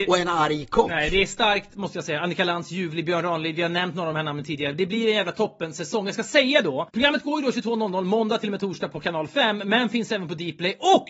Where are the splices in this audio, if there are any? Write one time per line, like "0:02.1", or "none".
none